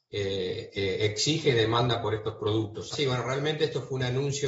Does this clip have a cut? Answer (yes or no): yes